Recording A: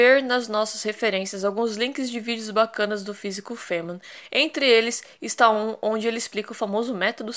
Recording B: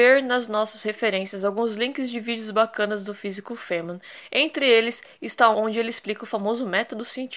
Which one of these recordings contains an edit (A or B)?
B